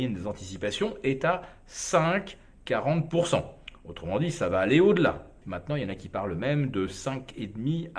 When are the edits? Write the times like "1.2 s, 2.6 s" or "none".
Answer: 5.4 s

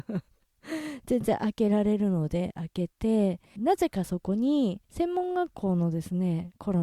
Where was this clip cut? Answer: 3.6 s, 4.8 s

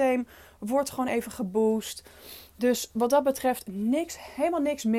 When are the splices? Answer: none

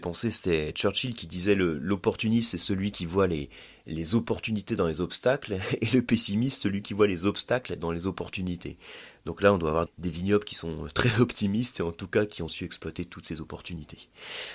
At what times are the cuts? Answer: 9.9 s

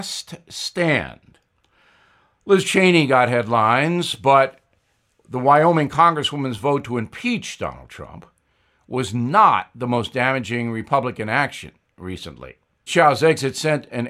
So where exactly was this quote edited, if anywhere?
12.9 s

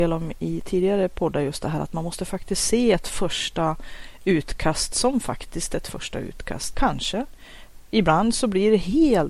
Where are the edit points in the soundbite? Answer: 6.7 s

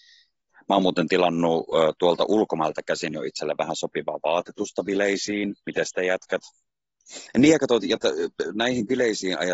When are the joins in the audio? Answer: 7.3 s

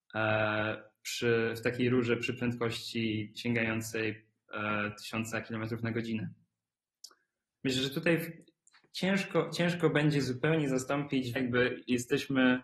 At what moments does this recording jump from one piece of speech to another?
7.5 s, 11.4 s

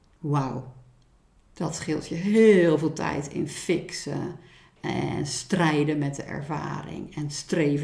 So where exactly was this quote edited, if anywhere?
1.5 s

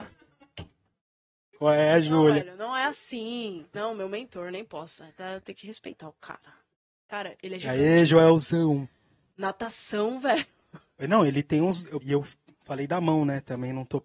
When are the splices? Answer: 3.7 s, 12.0 s

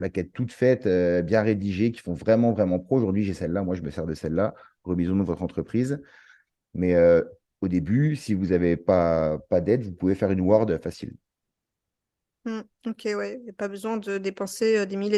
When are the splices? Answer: none

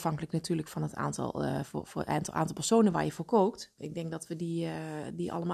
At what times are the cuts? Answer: 3.8 s

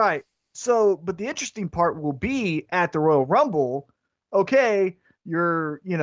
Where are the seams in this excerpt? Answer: none

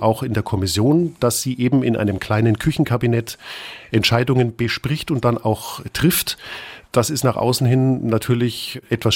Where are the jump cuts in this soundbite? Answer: none

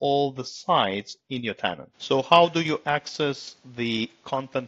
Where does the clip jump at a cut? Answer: 1.9 s

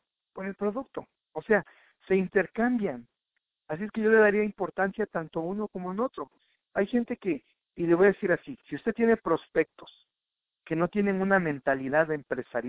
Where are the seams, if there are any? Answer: none

